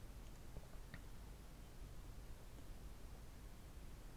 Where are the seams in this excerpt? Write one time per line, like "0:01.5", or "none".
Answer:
none